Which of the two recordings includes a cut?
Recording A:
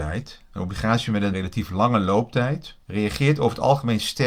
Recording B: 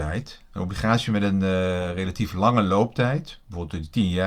A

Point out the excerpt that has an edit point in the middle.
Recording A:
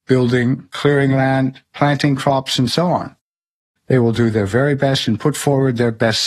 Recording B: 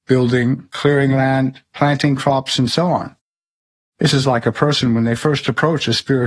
A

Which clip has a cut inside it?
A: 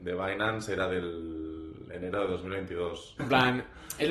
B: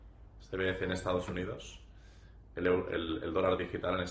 A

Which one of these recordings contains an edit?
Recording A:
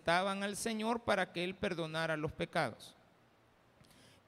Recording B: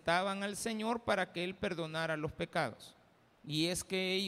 B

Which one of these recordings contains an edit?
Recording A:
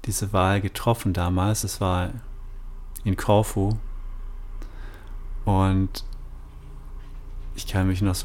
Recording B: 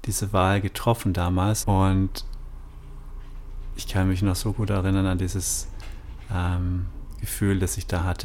B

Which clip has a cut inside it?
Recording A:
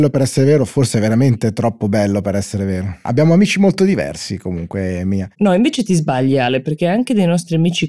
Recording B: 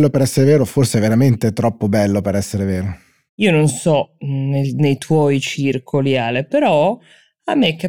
A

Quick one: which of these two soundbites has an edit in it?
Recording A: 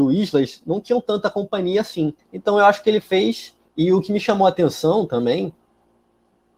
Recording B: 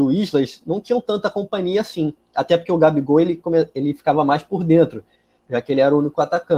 A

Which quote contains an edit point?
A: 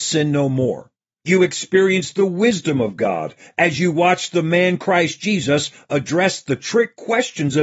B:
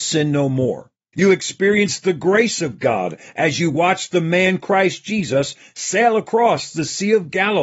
B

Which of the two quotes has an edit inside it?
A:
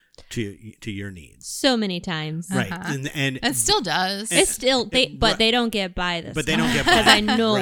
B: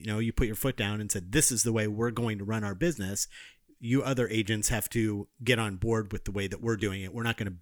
A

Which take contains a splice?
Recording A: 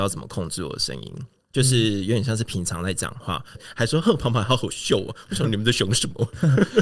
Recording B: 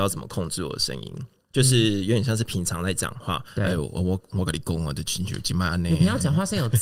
A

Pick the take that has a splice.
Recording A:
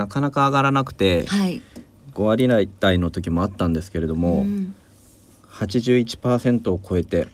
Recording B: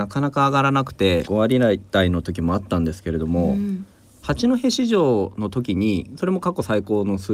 B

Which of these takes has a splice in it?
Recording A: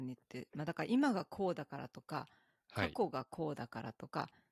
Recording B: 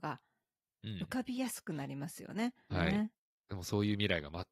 B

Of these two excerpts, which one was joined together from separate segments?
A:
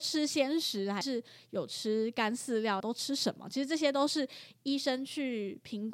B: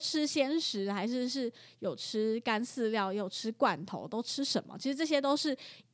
A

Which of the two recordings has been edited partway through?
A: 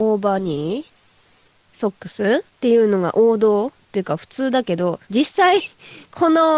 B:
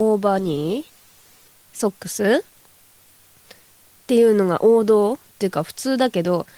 A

